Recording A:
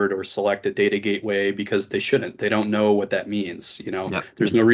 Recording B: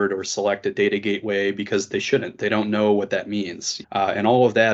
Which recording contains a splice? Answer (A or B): B